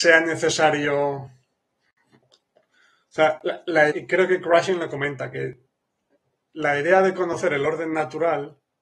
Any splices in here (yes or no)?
yes